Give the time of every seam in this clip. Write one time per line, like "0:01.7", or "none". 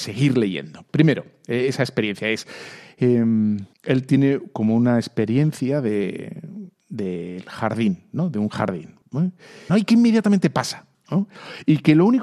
0:03.7
0:09.7

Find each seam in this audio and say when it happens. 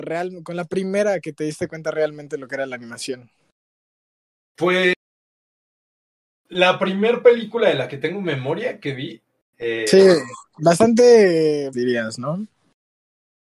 0:09.5
0:11.7

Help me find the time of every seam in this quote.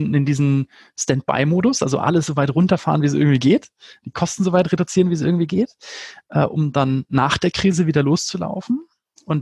none

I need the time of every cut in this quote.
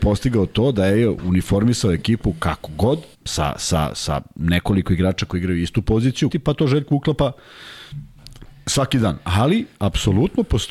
0:03.1
0:06.3

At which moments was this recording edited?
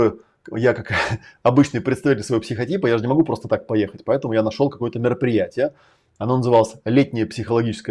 none

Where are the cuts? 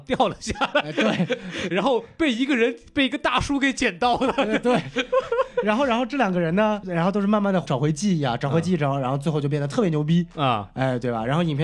none

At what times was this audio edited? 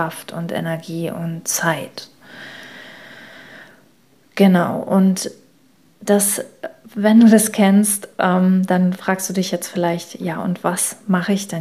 none

